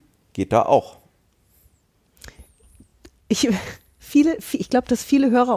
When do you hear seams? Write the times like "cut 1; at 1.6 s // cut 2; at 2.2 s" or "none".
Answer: none